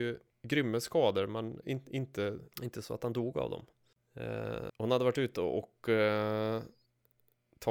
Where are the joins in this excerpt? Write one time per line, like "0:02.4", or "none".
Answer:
0:02.5
0:04.7